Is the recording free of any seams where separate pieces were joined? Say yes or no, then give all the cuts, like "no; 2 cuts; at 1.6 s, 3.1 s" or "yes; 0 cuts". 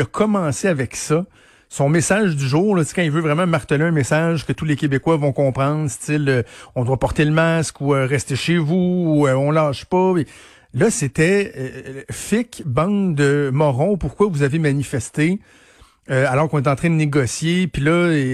yes; 0 cuts